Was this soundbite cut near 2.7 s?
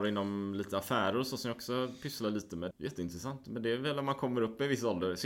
yes; 1 cut; at 2.7 s

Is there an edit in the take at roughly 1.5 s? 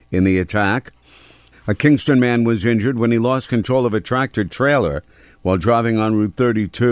yes; 1 cut; at 1.5 s

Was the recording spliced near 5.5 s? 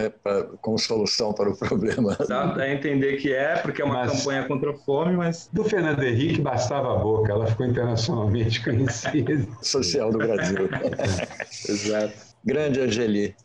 no; 2 cuts; at 2.3 s, 9.6 s

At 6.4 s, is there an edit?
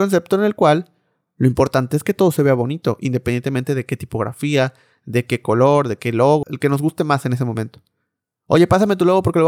yes; 1 cut; at 6.4 s

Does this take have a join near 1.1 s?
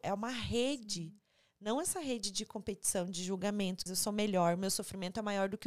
no; 1 cut; at 3.9 s

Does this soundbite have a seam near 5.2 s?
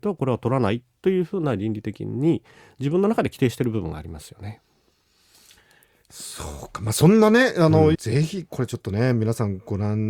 no; 1 cut; at 7.9 s

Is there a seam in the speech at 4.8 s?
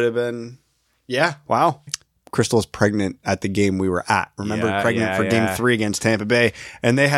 yes; 2 cuts; at 1.9 s, 4.8 s

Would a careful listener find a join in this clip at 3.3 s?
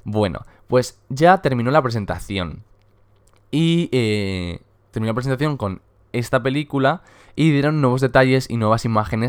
no; 0 cuts

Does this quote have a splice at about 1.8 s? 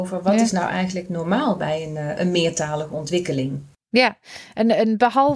no; 1 cut; at 3.7 s

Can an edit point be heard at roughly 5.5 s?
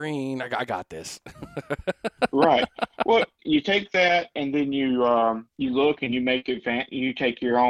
yes; 2 cuts; at 3.4 s, 5.5 s

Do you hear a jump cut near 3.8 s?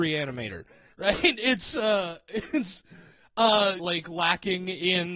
yes; 1 cut; at 3.8 s

